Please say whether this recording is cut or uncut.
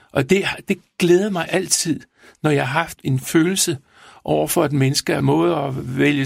cut